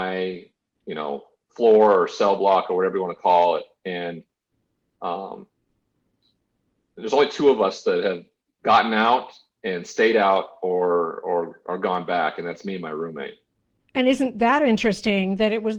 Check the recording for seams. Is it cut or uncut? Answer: uncut